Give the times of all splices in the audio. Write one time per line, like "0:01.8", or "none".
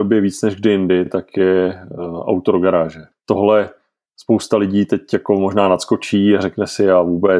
none

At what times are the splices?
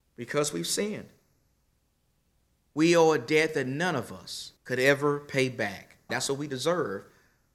0:02.6
0:04.6
0:06.1

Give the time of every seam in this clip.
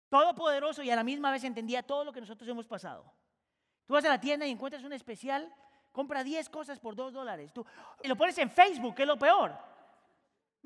0:03.8
0:08.0

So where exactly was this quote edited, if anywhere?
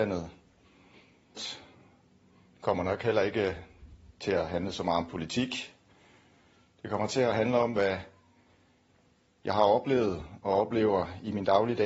0:01.4

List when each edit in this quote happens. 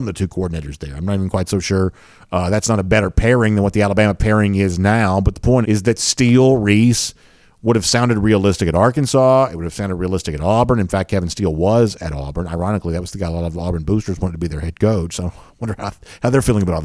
0:05.6

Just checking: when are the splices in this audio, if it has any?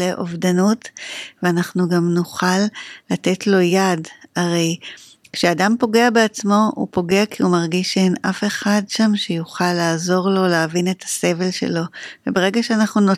none

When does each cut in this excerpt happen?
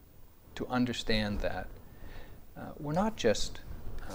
none

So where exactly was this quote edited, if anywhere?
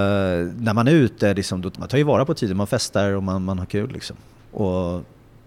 0:01.7
0:04.4

